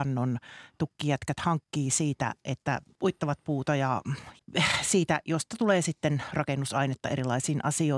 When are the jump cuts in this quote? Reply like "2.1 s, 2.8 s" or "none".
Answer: none